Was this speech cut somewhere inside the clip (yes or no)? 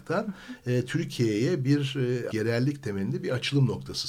yes